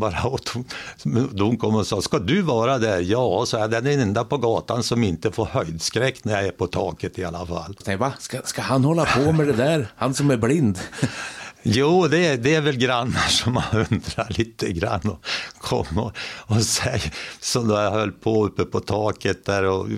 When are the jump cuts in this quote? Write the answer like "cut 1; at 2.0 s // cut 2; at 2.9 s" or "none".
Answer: cut 1; at 7.8 s